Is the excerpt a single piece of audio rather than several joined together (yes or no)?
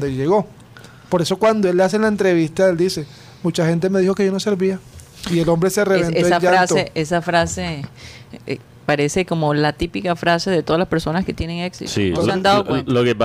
no